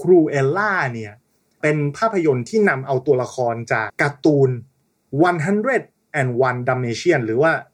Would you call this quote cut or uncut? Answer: cut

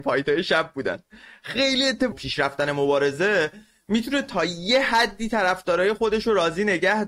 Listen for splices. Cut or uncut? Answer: cut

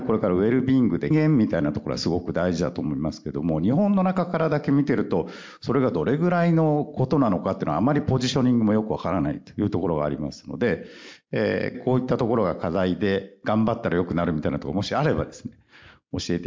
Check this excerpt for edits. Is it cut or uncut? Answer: cut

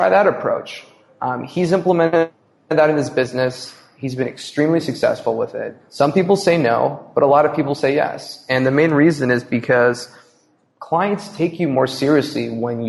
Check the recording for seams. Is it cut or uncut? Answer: uncut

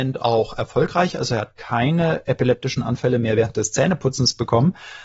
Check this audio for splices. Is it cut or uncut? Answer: uncut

